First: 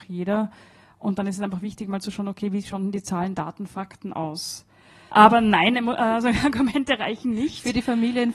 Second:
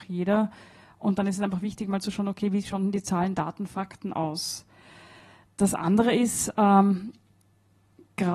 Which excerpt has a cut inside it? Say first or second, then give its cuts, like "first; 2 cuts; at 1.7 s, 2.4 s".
first; 1 cut; at 5.1 s